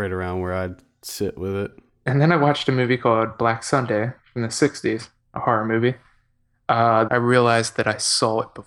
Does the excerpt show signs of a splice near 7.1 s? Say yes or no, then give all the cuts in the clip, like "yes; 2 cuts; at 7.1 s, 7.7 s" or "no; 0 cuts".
yes; 1 cut; at 7.1 s